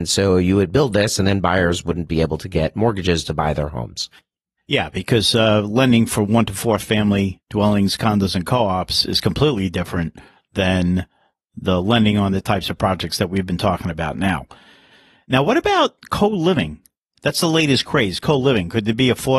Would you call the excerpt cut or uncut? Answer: uncut